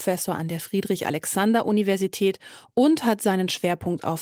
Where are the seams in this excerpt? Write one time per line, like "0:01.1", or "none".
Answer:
none